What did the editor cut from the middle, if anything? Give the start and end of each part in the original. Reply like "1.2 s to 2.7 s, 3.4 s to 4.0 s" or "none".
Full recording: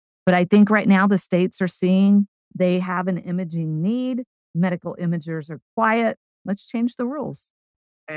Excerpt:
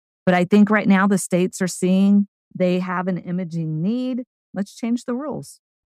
4.4 s to 6.3 s